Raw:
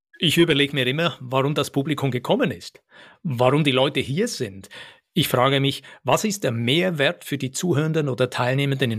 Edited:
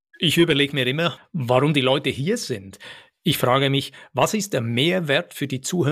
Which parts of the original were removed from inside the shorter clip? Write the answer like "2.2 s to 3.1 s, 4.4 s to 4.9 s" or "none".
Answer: 1.2 s to 3.1 s